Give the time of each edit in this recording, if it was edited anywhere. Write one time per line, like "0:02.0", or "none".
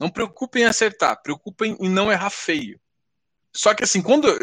0:03.4